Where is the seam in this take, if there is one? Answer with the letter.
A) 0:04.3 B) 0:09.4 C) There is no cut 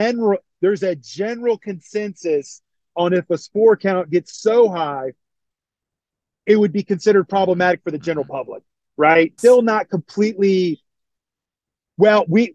B